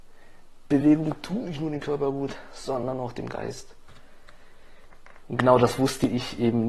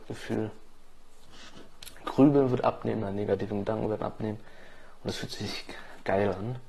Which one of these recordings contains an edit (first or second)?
first